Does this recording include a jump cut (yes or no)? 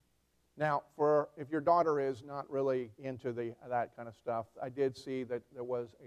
yes